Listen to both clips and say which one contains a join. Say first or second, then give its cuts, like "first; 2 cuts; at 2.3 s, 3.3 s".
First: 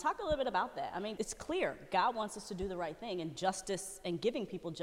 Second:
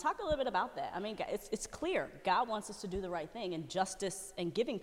first; 1 cut; at 1.2 s